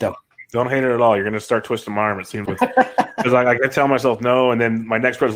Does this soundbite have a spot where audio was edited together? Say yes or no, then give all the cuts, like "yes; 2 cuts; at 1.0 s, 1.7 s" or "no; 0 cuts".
yes; 1 cut; at 2.5 s